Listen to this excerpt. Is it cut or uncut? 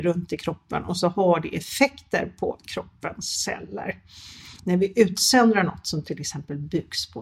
uncut